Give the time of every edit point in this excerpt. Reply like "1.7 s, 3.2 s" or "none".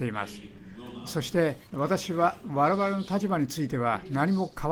1.7 s

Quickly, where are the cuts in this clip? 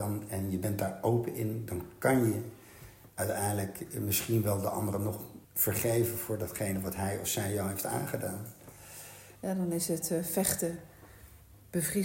5.4 s, 9.4 s

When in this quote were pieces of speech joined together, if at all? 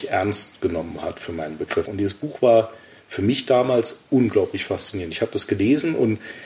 1.9 s

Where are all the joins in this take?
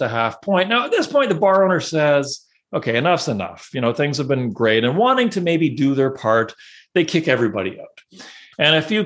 none

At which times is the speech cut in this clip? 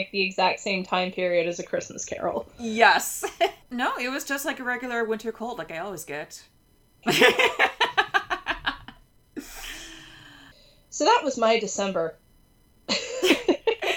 3.6 s, 7.0 s

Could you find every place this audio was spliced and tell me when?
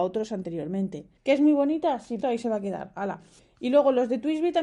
1.2 s, 2.2 s

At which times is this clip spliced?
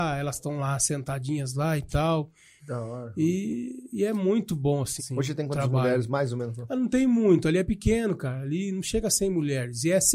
2.6 s, 5.0 s

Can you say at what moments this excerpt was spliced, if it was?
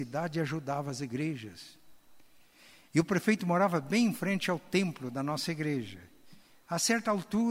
none

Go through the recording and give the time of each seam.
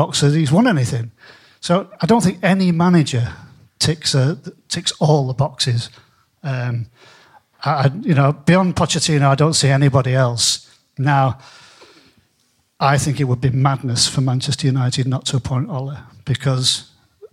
none

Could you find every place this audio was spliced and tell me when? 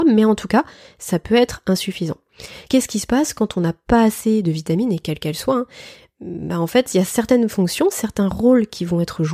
none

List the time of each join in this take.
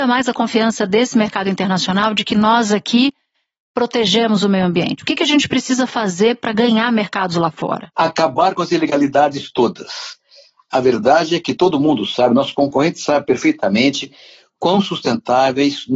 none

